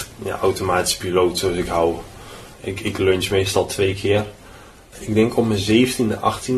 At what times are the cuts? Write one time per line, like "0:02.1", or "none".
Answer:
0:02.5
0:04.9